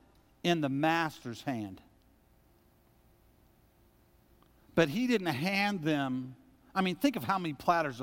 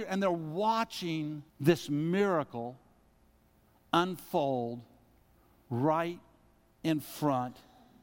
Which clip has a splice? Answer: second; 1 cut; at 1.5 s

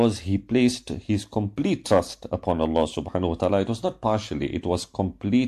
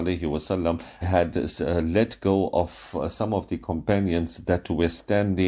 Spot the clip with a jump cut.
second; 1 cut; at 1.0 s

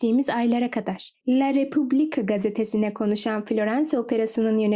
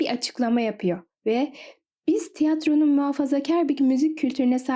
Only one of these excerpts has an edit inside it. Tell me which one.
first; 1 cut; at 1.2 s

